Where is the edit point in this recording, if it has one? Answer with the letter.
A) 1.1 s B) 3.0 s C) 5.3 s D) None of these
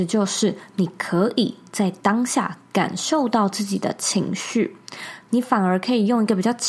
C